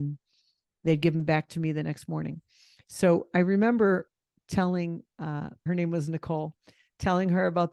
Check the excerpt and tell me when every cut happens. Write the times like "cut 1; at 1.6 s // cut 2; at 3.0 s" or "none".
cut 1; at 5.7 s